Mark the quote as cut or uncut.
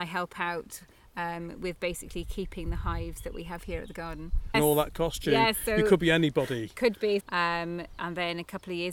cut